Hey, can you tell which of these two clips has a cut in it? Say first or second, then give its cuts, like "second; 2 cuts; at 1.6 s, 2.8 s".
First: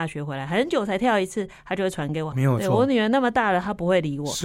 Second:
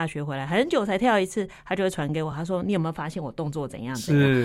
first; 1 cut; at 2.3 s